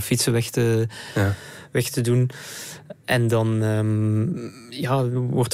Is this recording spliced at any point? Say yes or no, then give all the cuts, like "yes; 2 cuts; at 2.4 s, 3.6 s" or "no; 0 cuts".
no; 0 cuts